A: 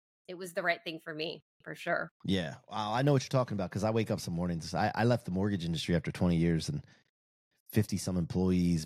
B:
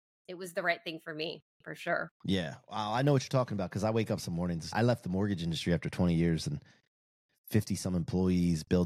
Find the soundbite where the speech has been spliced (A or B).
B